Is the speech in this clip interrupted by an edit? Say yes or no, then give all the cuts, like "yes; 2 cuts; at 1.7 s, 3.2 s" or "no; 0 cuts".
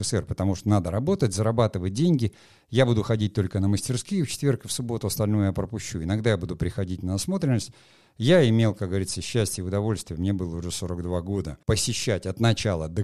yes; 1 cut; at 11.6 s